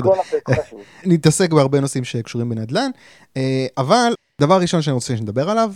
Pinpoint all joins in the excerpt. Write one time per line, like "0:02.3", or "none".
0:01.0